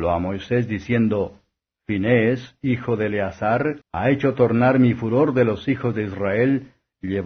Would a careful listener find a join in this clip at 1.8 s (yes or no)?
no